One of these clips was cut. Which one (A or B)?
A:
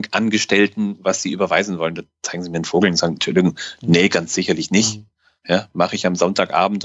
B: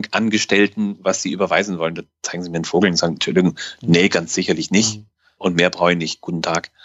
B